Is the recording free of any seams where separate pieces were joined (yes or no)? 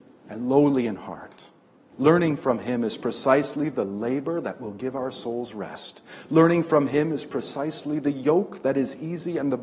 no